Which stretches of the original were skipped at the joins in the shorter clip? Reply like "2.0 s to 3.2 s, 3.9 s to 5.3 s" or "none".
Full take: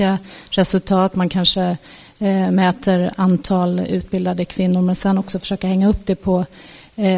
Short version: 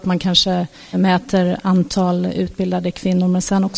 2.0 s to 2.5 s